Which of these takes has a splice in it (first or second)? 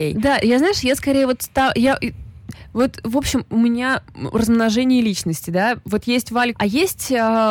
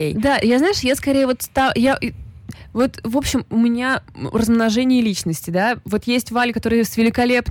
first